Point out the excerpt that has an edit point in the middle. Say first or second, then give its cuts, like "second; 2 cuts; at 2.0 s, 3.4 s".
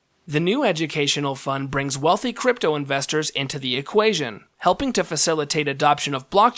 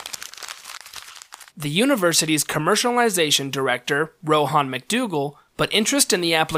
second; 2 cuts; at 1.5 s, 5.5 s